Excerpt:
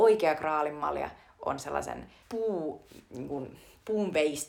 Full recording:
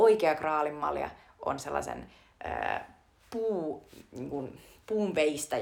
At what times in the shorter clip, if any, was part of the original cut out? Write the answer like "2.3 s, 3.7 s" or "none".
2.2 s